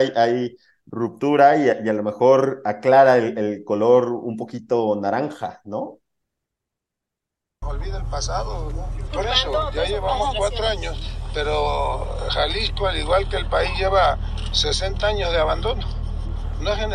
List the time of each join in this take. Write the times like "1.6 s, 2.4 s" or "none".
7.6 s, 9.1 s